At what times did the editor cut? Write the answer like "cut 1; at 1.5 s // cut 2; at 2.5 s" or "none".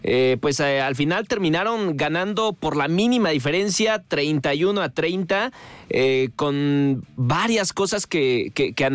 none